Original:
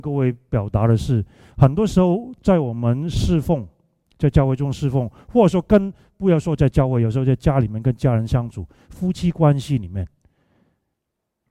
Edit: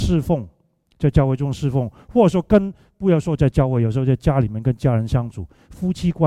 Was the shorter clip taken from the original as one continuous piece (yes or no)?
yes